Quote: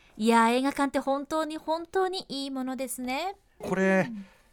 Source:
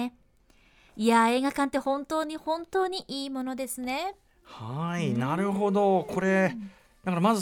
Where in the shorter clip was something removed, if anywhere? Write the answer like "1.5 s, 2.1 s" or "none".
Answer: 3.6 s